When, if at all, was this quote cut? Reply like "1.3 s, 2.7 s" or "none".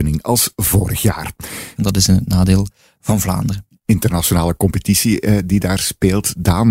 1.8 s